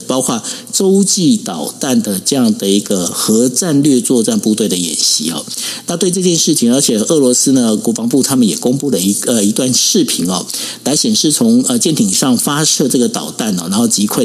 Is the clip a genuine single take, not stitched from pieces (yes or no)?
yes